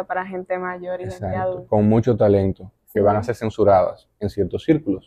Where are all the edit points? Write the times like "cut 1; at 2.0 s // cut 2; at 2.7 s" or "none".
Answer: cut 1; at 3.0 s